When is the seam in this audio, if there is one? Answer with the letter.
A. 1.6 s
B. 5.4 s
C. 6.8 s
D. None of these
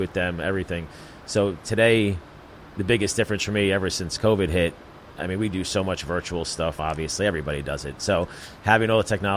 C